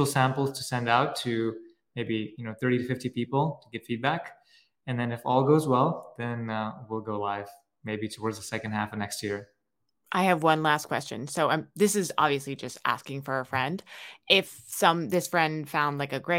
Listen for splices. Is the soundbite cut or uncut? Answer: uncut